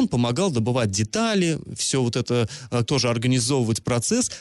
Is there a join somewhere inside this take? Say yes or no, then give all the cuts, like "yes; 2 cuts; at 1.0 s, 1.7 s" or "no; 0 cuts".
yes; 1 cut; at 2.8 s